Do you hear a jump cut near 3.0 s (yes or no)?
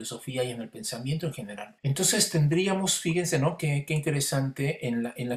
no